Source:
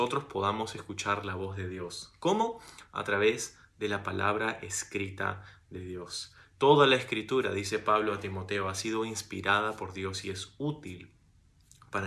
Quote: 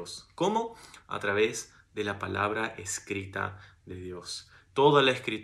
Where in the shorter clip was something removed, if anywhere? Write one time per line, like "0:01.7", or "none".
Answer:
none